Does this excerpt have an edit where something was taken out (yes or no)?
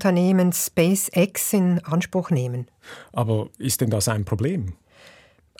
no